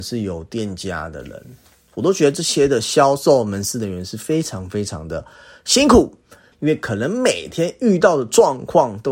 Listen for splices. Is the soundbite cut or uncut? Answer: cut